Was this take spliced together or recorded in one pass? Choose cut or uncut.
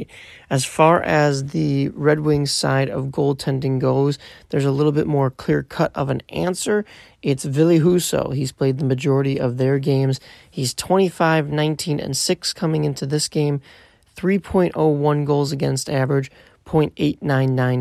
uncut